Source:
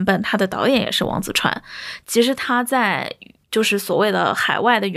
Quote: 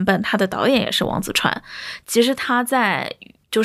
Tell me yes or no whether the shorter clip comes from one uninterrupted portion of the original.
yes